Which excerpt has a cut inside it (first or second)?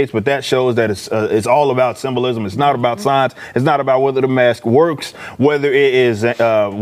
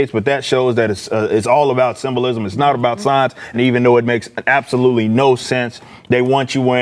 second